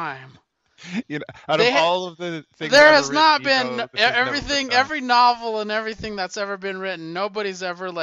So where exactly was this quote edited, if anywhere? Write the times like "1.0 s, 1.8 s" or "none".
none